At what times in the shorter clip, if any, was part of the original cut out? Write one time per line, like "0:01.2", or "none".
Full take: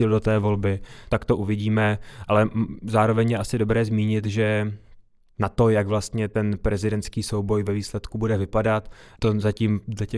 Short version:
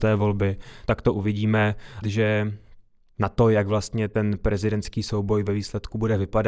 0:02.0